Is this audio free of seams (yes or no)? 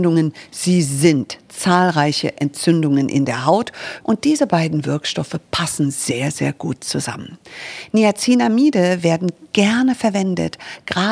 no